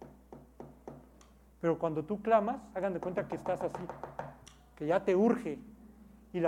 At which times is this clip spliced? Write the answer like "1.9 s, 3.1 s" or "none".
none